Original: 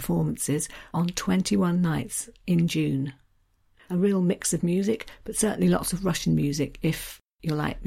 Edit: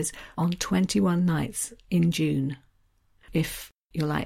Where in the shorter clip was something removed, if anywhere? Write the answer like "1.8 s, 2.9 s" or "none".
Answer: 3.3 s